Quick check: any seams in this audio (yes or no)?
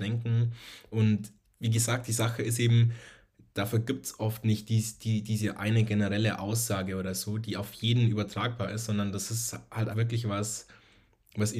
yes